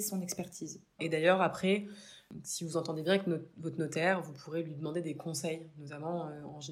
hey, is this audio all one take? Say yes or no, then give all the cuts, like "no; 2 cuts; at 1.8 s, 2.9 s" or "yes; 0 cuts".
no; 1 cut; at 1.0 s